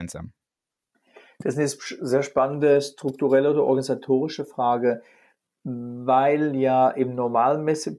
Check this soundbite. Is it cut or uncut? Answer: uncut